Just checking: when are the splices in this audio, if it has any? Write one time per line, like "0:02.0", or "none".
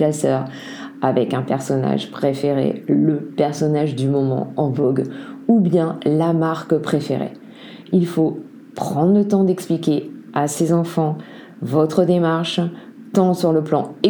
none

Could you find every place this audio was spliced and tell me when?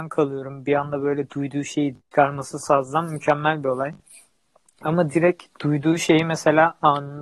0:02.0
0:04.8

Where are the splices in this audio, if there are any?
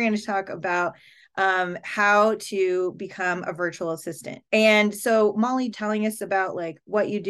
0:04.5
0:05.7

